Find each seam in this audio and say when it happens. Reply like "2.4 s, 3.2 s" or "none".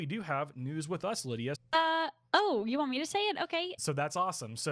1.5 s, 3.8 s